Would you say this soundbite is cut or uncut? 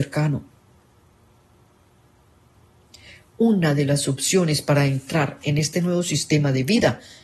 uncut